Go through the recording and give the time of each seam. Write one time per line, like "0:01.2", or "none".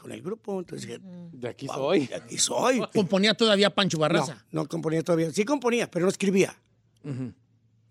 0:02.9